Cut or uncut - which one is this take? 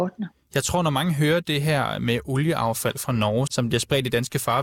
cut